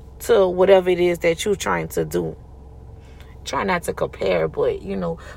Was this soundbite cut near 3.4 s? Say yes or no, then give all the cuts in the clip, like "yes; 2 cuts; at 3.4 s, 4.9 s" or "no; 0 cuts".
yes; 1 cut; at 3.4 s